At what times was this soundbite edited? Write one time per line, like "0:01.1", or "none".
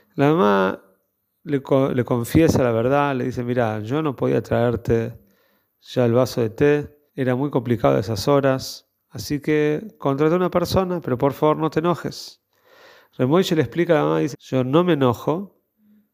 0:07.1
0:14.3

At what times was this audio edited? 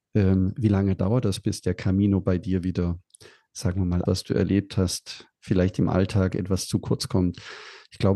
0:04.1

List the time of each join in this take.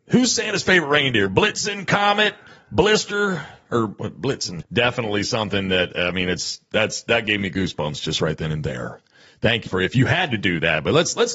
0:04.6
0:09.7

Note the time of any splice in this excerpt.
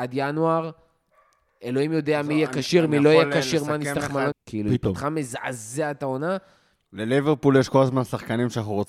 0:04.3
0:06.8

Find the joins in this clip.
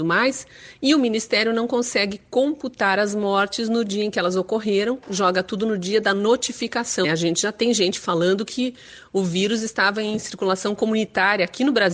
0:07.0

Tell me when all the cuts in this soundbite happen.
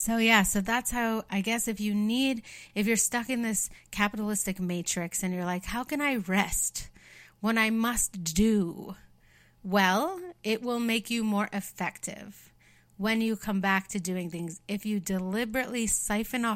none

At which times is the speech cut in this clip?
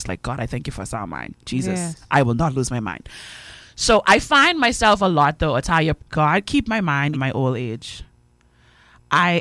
0:06.0
0:07.1

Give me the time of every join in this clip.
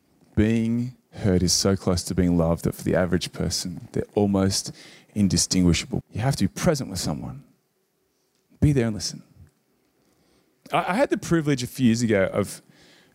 0:01.0
0:06.0

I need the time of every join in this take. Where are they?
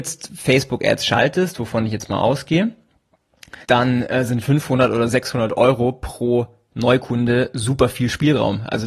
0:03.6

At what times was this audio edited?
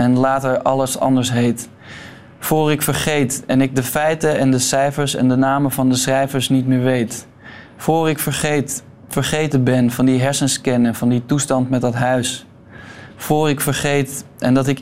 none

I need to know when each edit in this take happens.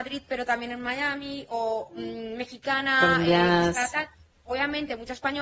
none

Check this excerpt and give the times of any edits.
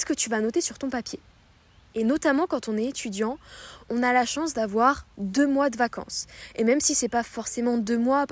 0:01.9

